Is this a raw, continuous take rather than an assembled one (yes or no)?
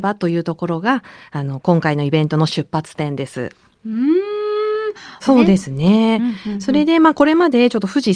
no